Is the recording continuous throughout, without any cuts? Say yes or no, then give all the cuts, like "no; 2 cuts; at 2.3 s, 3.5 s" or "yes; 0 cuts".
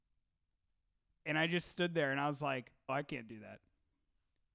no; 1 cut; at 2.9 s